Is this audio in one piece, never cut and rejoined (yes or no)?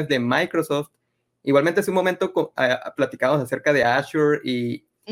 yes